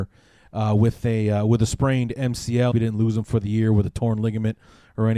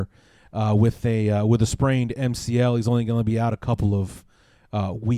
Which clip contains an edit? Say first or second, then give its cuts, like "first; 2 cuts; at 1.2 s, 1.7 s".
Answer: first; 1 cut; at 2.7 s